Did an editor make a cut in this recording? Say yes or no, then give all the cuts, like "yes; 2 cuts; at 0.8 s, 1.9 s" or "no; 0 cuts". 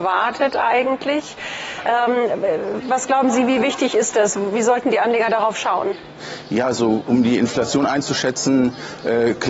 no; 0 cuts